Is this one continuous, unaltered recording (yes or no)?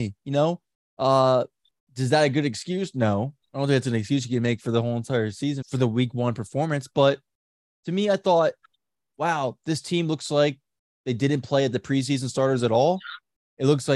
no